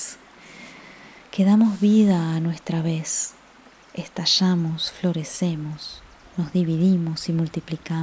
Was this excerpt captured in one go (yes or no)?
yes